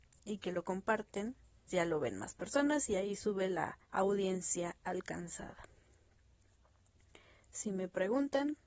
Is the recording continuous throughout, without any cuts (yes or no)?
no